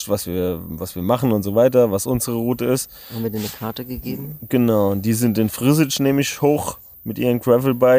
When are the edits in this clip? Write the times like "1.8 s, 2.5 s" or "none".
none